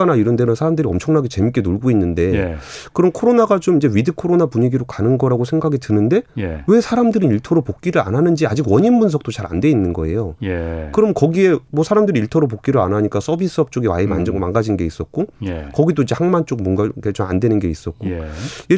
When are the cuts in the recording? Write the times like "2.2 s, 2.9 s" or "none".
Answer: none